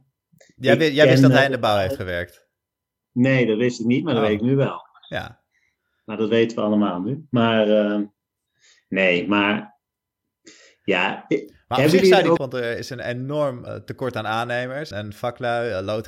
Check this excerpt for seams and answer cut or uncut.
cut